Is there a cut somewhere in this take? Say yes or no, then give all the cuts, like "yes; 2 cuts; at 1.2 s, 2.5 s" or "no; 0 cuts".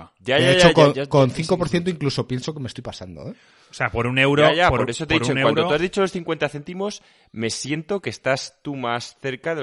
no; 0 cuts